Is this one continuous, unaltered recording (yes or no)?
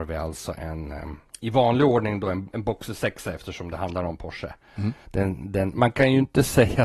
no